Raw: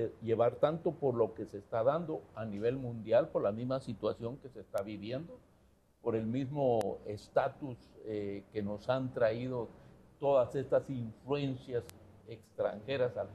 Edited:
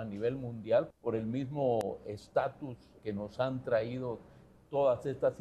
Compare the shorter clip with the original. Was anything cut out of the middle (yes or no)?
yes